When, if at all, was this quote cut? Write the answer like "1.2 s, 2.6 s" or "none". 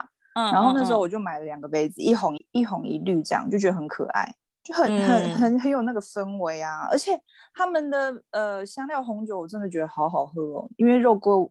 2.4 s